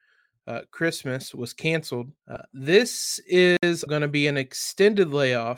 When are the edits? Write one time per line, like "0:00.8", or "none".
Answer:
0:02.2
0:03.9